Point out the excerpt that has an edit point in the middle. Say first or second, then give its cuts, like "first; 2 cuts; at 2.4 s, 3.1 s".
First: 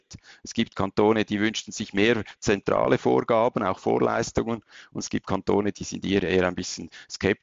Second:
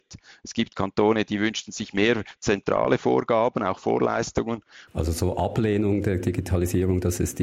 second; 1 cut; at 4.9 s